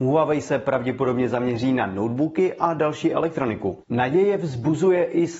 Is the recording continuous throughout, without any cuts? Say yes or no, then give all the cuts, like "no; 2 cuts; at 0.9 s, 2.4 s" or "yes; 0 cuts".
no; 1 cut; at 3.8 s